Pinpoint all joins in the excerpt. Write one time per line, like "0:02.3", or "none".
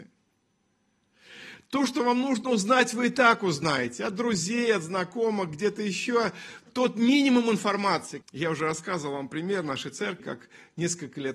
0:08.2
0:10.2